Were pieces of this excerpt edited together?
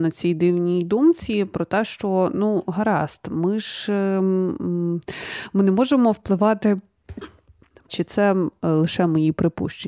yes; 1 cut; at 7.9 s

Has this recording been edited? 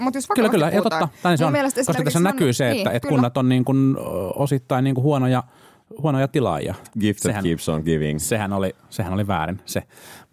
yes; 1 cut; at 6.8 s

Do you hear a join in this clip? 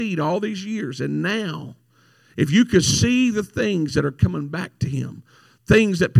no; 0 cuts

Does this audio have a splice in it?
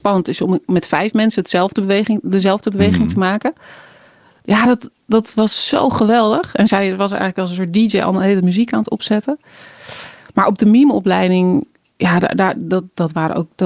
no; 0 cuts

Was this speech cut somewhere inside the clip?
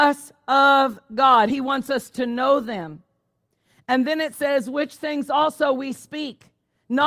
no; 0 cuts

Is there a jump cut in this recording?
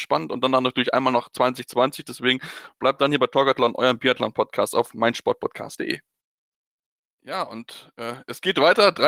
no; 0 cuts

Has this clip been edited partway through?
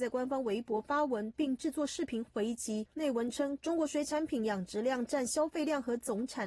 yes; 1 cut; at 2.9 s

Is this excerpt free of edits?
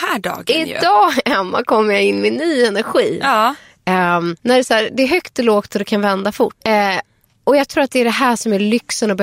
no; 2 cuts; at 4.4 s, 6.6 s

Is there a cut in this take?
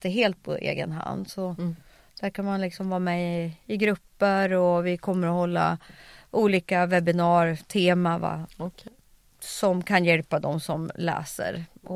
no; 0 cuts

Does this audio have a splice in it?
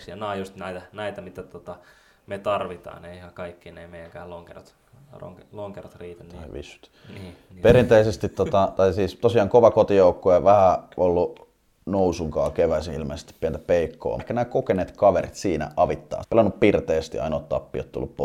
yes; 2 cuts; at 14.2 s, 16.2 s

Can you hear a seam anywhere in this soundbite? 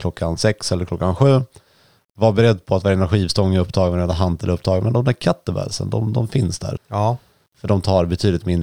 yes; 1 cut; at 6.8 s

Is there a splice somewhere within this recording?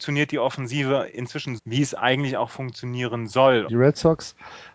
yes; 2 cuts; at 1.6 s, 3.7 s

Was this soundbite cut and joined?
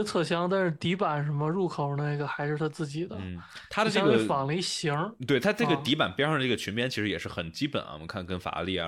no; 0 cuts

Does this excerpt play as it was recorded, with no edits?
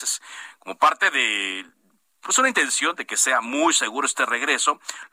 yes; 0 cuts

